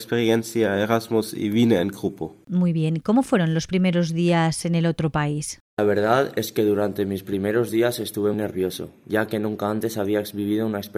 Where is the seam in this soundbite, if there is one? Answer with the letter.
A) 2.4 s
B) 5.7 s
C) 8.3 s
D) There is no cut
C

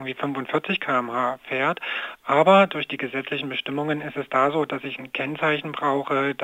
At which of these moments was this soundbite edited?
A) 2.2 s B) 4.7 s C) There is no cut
C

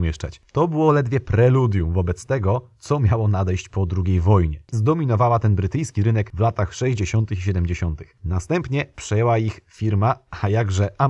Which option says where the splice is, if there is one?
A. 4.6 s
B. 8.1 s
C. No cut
A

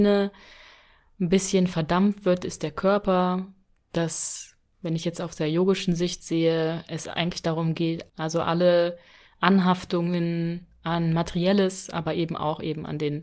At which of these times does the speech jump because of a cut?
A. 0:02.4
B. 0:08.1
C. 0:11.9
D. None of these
B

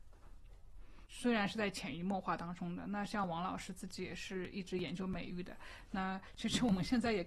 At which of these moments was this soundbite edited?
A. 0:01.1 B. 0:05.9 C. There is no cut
A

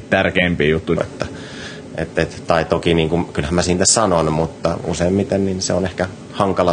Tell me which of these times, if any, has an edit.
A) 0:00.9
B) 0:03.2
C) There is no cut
A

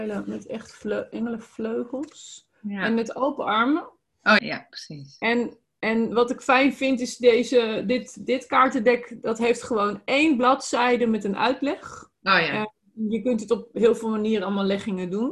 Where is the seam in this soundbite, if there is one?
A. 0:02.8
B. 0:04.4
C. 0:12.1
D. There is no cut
B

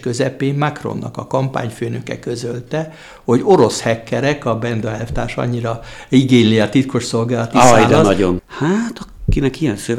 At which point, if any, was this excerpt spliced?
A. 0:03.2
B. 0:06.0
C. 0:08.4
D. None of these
C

